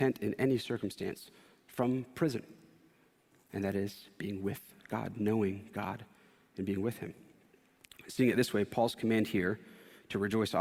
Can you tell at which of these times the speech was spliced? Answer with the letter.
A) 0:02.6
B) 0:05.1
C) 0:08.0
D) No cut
D